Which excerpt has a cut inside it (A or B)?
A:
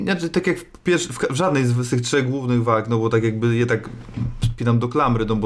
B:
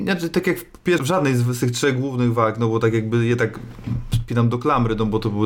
B